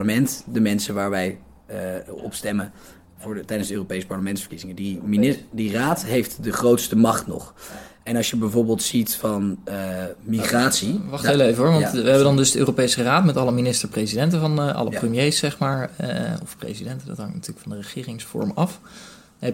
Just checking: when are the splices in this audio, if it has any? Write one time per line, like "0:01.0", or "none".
none